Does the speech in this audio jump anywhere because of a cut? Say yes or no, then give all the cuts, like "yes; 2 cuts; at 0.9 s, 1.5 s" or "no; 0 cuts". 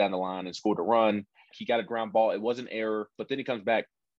yes; 2 cuts; at 1.5 s, 3.2 s